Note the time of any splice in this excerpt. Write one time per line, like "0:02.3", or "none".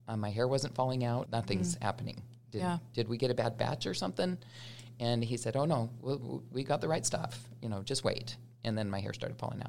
0:01.3